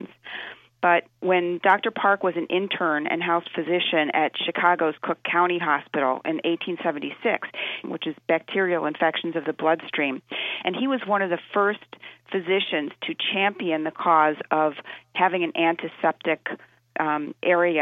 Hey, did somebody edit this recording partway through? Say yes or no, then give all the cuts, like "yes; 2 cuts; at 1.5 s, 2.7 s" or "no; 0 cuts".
yes; 1 cut; at 7.8 s